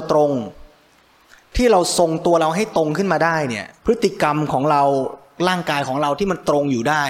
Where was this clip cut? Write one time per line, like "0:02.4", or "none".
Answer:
0:03.8